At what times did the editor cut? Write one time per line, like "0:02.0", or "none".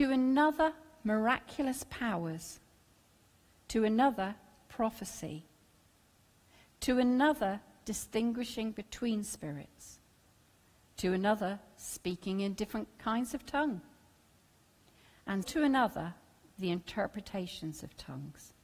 0:15.4